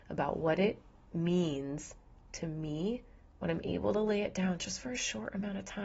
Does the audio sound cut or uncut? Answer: uncut